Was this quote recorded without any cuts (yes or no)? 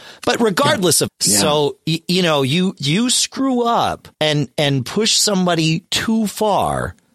no